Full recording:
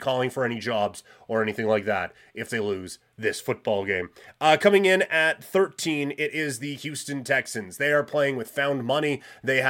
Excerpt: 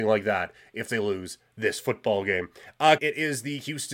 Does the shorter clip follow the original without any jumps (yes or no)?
no